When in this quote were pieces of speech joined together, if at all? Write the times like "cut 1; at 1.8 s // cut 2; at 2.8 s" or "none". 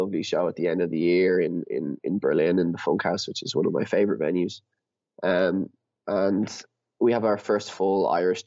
none